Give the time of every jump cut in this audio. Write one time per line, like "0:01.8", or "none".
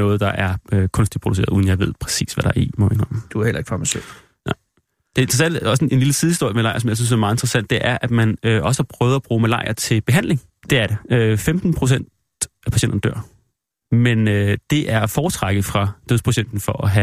0:10.6